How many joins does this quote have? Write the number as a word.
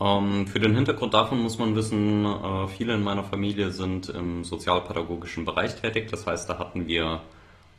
zero